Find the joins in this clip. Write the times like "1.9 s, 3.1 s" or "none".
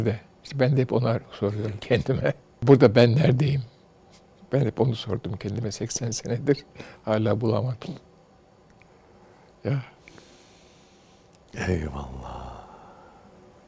none